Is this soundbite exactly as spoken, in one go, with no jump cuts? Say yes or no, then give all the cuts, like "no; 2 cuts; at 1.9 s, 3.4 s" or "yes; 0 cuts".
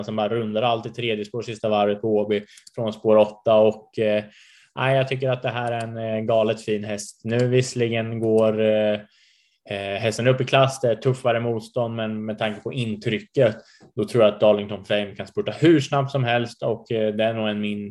yes; 0 cuts